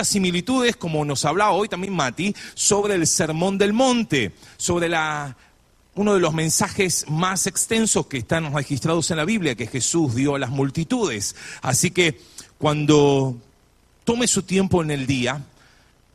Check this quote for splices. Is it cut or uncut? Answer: uncut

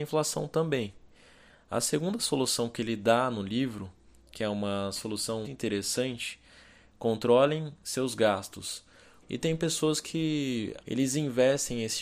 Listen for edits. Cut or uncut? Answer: cut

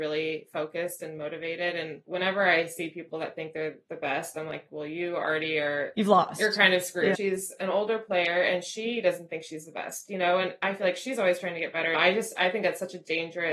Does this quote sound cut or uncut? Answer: cut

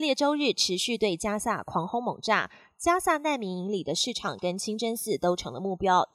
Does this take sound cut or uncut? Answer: uncut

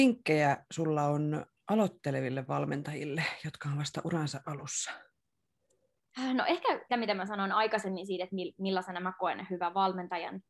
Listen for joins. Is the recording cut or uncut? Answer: cut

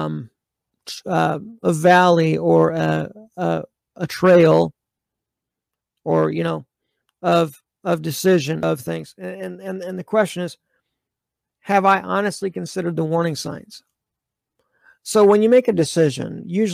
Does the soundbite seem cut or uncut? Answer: uncut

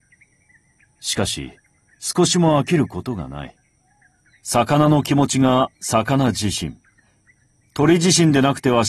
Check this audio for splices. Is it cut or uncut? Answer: cut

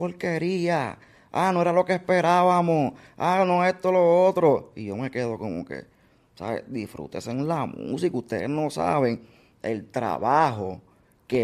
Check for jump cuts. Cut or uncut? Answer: uncut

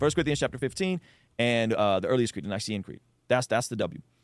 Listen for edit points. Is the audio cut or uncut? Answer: cut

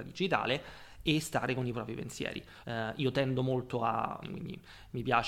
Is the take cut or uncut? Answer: cut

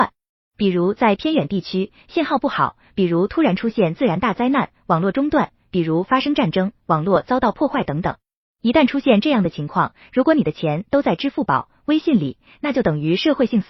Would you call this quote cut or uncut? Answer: uncut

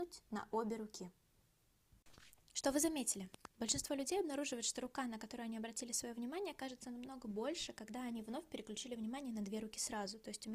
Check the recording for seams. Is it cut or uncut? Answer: uncut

